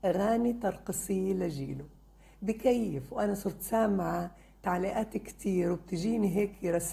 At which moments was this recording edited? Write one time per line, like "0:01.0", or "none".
none